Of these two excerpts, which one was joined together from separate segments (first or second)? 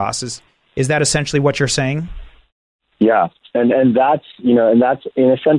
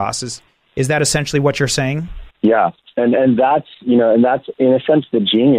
second